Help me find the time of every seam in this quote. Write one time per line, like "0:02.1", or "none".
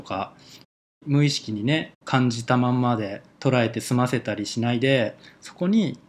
0:02.0